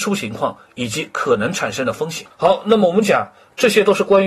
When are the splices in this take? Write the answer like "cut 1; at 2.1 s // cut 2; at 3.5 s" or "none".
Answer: cut 1; at 2.3 s